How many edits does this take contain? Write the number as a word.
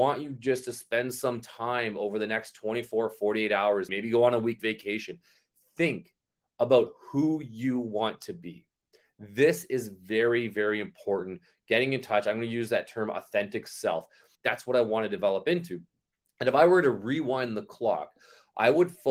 two